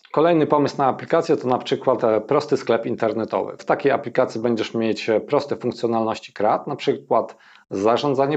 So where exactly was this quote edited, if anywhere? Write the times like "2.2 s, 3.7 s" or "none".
3.6 s